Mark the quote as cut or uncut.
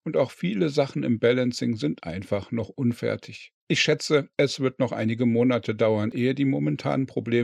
uncut